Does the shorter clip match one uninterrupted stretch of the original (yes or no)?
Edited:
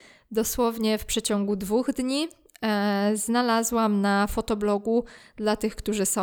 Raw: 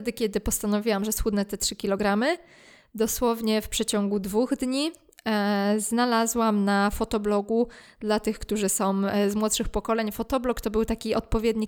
yes